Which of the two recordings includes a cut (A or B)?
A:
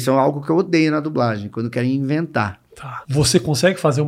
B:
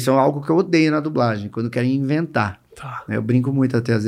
A